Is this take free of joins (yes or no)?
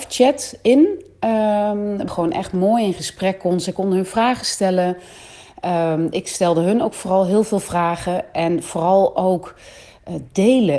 no